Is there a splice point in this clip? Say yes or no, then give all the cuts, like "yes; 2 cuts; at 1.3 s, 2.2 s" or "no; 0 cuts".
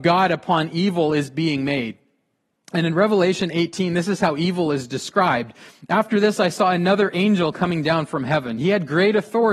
no; 0 cuts